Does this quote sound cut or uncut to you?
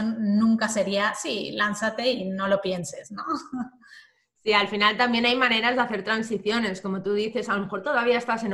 uncut